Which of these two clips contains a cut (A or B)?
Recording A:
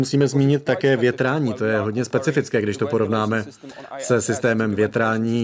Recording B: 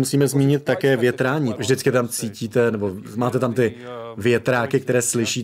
B